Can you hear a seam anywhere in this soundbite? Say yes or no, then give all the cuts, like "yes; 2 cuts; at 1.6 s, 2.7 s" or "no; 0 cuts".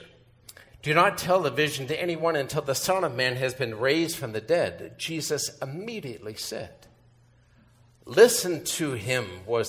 no; 0 cuts